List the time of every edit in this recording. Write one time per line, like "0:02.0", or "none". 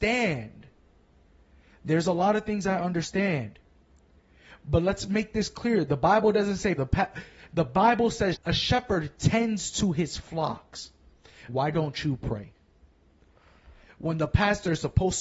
0:06.8
0:08.3
0:11.5